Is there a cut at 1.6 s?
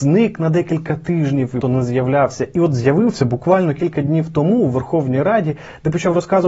yes; 1 cut; at 1.6 s

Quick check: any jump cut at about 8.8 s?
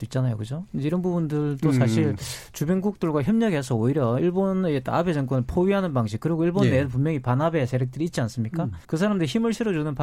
yes; 1 cut; at 8.8 s

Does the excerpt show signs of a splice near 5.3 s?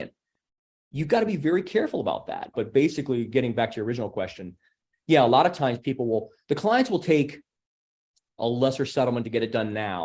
no; 1 cut; at 2.5 s

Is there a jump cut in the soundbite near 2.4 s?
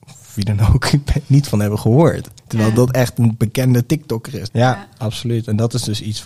yes; 2 cuts; at 2.4 s, 4.5 s

